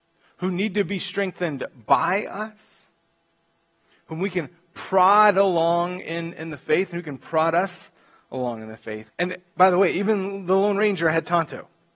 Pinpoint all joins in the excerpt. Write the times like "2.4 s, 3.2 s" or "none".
9.1 s